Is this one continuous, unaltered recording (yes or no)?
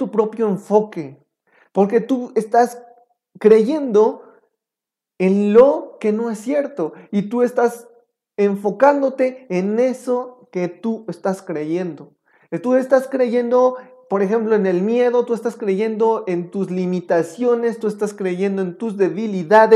yes